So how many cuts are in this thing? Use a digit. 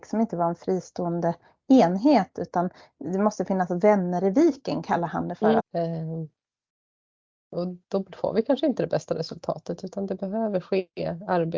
2